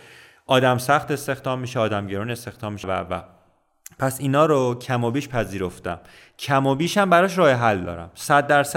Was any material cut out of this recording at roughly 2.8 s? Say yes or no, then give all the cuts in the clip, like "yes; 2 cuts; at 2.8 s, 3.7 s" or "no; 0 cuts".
yes; 1 cut; at 2.8 s